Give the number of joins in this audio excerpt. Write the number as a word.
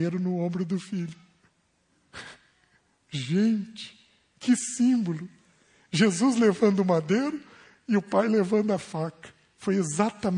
zero